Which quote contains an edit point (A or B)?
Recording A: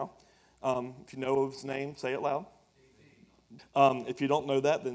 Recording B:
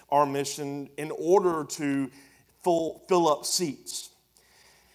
A